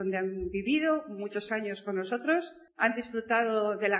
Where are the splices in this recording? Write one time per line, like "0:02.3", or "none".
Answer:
0:02.7